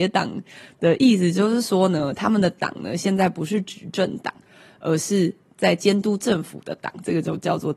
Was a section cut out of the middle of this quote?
no; 0 cuts

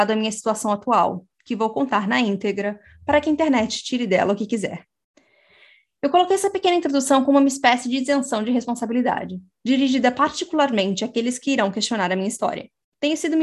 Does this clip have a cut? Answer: no; 0 cuts

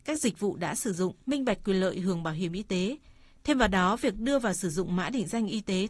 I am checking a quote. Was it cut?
yes; 1 cut; at 1.2 s

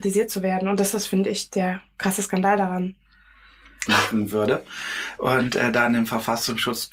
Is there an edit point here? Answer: yes; 2 cuts; at 3.9 s, 5.2 s

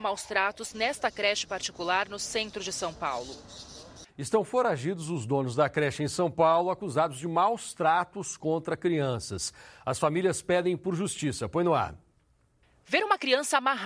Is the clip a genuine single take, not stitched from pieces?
no; 1 cut; at 4.1 s

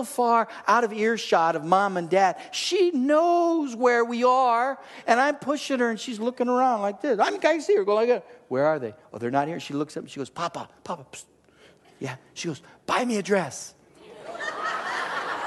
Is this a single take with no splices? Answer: yes; 0 cuts

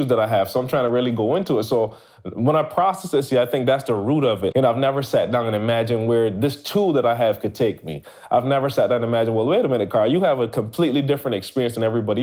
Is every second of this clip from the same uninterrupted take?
no; 1 cut; at 4.5 s

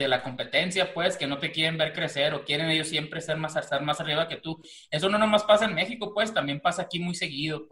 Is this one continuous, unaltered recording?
yes; 0 cuts

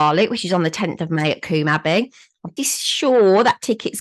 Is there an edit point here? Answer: yes; 1 cut; at 2.6 s

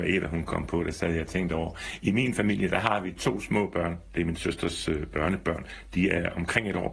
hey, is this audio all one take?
yes; 0 cuts

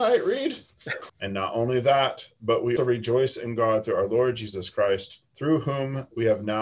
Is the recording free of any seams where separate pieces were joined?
no; 3 cuts; at 1.1 s, 2.8 s, 5.3 s

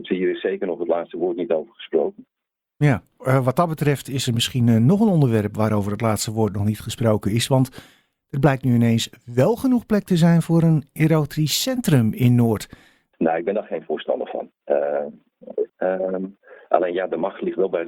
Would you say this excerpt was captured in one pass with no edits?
no; 3 cuts; at 3.2 s, 13.1 s, 15.7 s

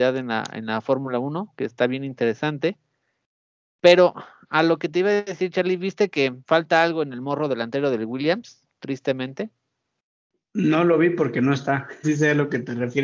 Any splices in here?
yes; 2 cuts; at 8.7 s, 12.0 s

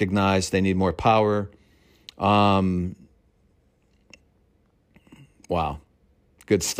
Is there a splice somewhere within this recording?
no; 0 cuts

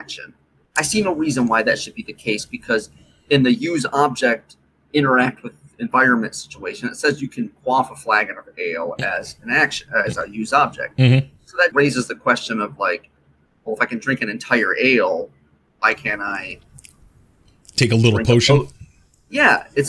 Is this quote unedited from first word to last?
no; 1 cut; at 11.7 s

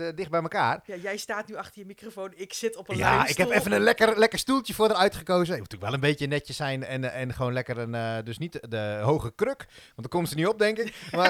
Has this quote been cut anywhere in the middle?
no; 0 cuts

